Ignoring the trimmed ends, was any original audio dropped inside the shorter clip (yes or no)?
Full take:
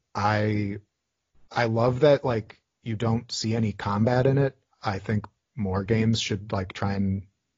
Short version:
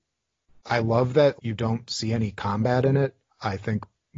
yes